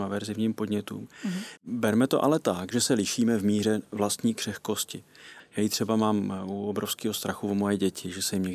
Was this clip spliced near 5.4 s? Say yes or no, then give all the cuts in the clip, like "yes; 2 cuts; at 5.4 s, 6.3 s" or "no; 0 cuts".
yes; 2 cuts; at 1.6 s, 5.4 s